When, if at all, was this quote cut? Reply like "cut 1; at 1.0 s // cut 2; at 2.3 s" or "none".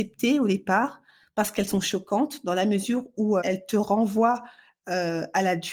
cut 1; at 3.4 s